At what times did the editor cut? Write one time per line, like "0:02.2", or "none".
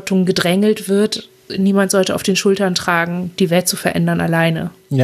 0:01.5